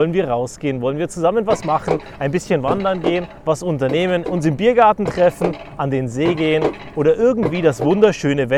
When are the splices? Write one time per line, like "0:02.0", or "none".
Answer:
none